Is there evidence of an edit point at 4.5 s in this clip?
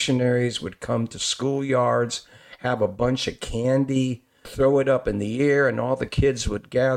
yes; 1 cut; at 4.5 s

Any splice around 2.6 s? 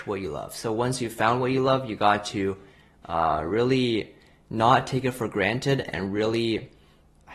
no; 0 cuts

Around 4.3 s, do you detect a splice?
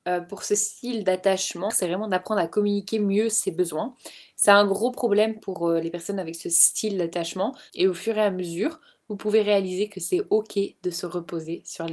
no; 2 cuts; at 1.7 s, 7.7 s

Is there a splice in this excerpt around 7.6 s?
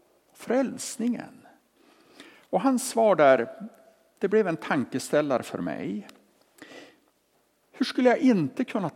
yes; 1 cut; at 7.6 s

